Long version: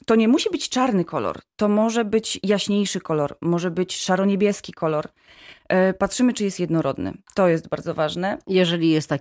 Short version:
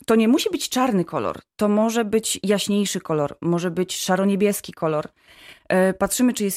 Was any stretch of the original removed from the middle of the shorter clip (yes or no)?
no